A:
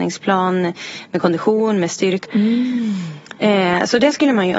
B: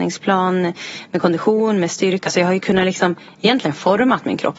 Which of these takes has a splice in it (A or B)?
A